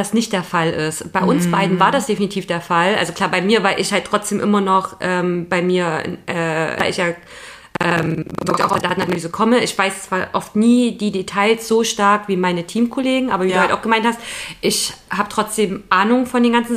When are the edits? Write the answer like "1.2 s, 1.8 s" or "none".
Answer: 6.8 s